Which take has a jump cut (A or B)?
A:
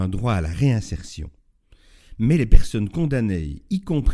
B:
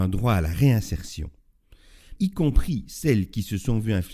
B